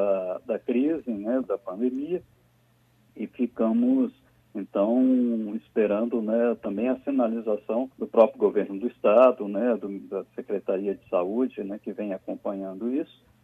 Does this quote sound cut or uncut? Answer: cut